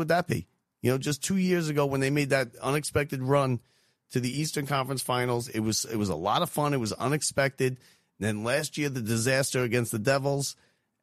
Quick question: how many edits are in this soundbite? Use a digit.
0